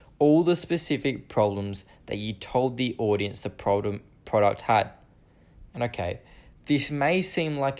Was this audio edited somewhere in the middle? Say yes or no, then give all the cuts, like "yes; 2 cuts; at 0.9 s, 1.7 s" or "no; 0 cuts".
yes; 1 cut; at 5.7 s